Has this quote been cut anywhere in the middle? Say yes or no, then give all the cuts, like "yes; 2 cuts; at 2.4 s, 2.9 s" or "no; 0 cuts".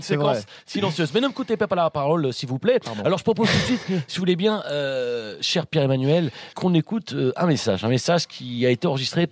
yes; 1 cut; at 6.5 s